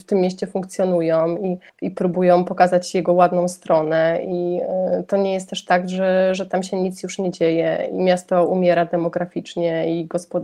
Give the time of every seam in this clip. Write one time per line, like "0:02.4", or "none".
none